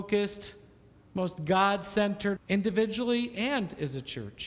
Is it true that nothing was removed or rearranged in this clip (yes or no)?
no